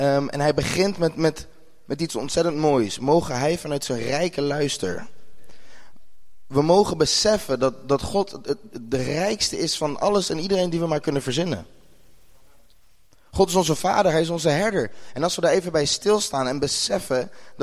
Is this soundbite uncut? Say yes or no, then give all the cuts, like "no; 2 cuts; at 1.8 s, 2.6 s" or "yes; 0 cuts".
yes; 0 cuts